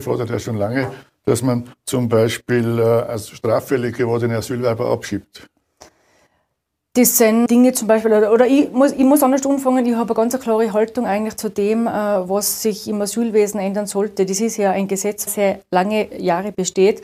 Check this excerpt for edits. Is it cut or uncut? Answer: cut